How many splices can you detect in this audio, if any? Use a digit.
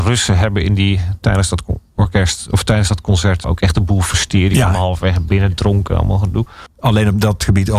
2